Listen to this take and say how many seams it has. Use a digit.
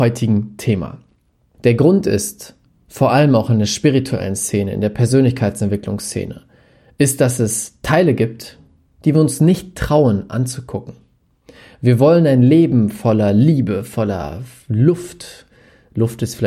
1